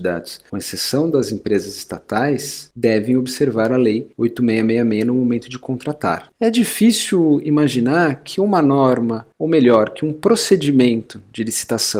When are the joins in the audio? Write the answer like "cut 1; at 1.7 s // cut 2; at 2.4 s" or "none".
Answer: cut 1; at 6.3 s

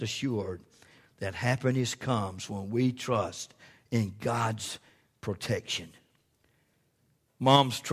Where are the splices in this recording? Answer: none

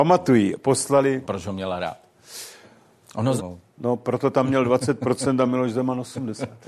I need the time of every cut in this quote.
cut 1; at 1.2 s // cut 2; at 3.4 s

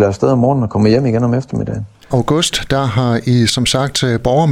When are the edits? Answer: cut 1; at 2.1 s

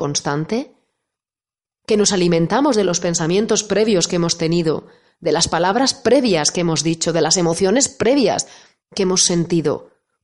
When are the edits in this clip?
none

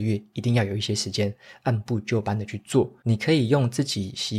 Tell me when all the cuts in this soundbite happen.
cut 1; at 3.0 s

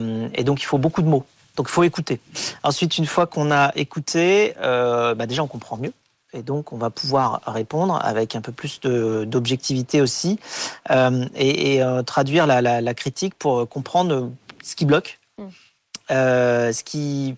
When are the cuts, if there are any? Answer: none

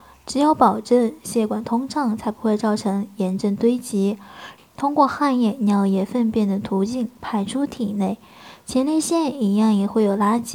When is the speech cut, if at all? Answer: cut 1; at 4.6 s

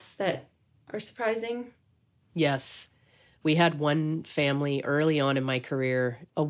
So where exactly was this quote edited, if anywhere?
none

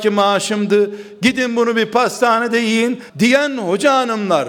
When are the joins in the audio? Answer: cut 1; at 3.1 s

